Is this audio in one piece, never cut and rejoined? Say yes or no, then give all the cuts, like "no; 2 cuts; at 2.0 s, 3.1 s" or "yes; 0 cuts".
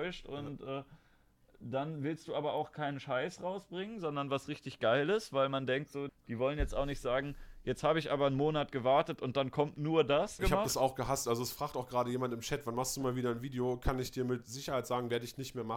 no; 2 cuts; at 6.1 s, 10.4 s